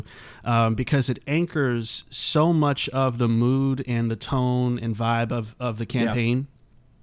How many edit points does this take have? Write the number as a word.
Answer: zero